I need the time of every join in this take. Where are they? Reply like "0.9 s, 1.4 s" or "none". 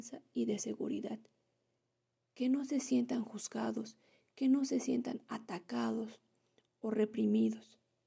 none